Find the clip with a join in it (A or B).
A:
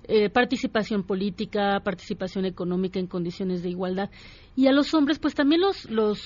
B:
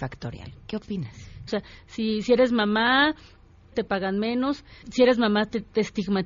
B